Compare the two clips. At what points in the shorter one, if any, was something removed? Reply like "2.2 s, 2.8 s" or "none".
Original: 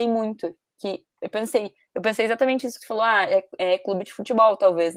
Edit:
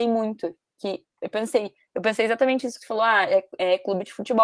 none